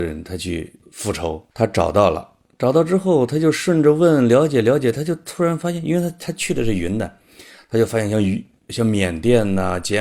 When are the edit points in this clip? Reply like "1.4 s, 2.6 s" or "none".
1.5 s